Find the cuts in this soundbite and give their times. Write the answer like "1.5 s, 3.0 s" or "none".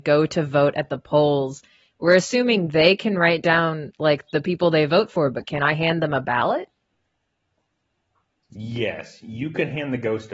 none